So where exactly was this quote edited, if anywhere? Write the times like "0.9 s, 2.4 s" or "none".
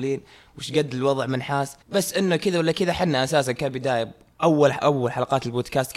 1.8 s